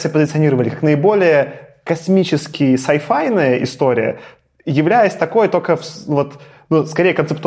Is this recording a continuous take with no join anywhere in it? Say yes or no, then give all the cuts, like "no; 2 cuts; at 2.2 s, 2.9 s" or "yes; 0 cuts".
yes; 0 cuts